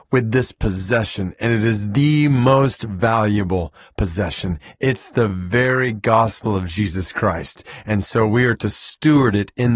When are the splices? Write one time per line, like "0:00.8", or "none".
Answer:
none